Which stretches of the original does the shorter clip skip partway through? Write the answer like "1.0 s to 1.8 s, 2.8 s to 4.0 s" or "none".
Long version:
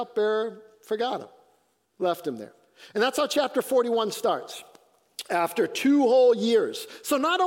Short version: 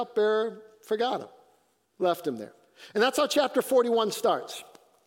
none